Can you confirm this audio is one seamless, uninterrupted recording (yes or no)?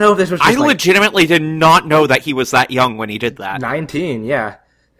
yes